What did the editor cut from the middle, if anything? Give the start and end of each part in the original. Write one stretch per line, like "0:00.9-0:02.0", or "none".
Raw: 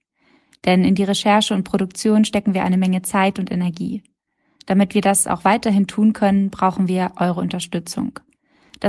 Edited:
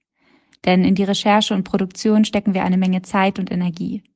none